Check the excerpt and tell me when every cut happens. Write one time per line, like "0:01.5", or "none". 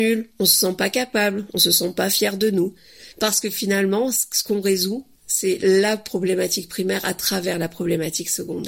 0:03.1